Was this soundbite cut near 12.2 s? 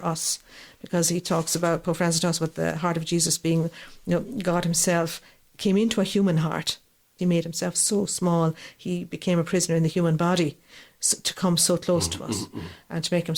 no; 1 cut; at 7.2 s

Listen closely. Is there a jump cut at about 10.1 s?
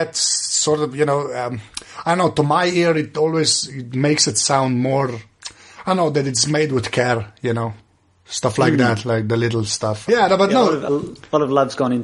yes; 1 cut; at 10.1 s

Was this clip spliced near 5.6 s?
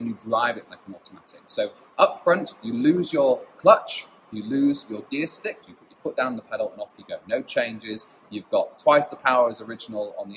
yes; 1 cut; at 5.6 s

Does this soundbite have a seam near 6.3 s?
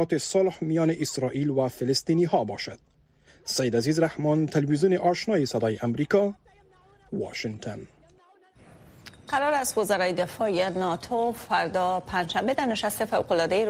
no; 1 cut; at 3.3 s

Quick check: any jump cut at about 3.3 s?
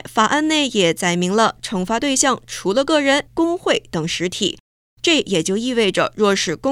yes; 1 cut; at 3.3 s

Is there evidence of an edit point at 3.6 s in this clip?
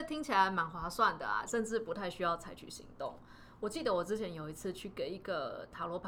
no; 1 cut; at 1.5 s

